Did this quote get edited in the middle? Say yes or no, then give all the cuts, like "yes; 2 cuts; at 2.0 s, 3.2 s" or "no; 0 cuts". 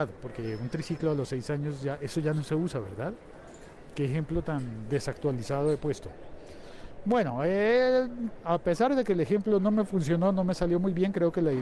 yes; 1 cut; at 8.4 s